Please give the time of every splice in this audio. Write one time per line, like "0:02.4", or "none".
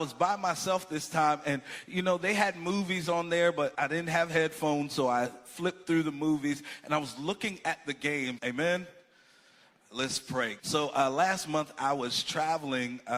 0:03.7
0:08.4
0:10.6